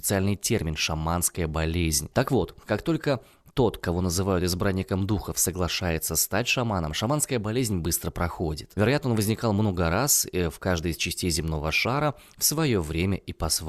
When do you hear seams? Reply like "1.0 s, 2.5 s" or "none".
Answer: 2.1 s, 8.8 s